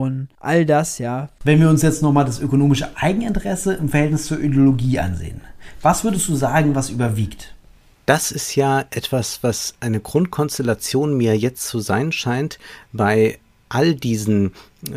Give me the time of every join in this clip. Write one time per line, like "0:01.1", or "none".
0:01.4